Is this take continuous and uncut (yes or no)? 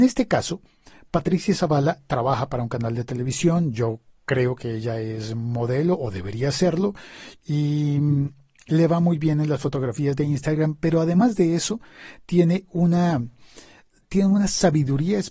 yes